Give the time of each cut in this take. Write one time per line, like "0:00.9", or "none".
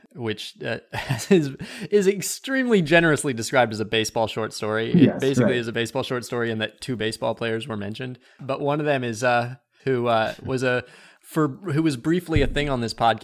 0:09.8